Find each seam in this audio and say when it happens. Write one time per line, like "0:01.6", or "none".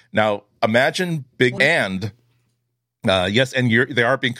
0:01.6